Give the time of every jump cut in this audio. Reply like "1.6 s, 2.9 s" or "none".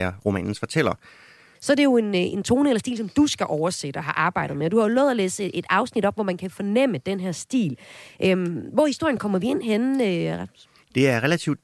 1.5 s